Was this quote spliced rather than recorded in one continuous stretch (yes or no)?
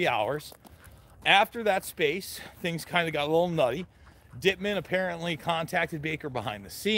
no